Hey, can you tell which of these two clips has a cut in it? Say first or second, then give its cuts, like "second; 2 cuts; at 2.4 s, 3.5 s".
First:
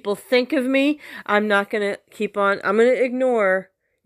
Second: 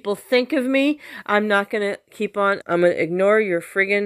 second; 1 cut; at 2.6 s